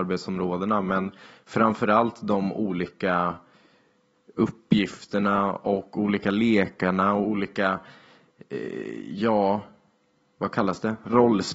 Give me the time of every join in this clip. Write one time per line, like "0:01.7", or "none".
none